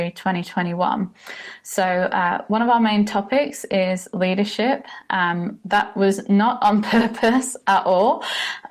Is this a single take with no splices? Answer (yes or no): yes